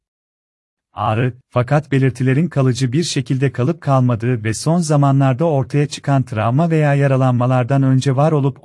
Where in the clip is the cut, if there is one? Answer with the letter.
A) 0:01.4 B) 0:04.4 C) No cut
A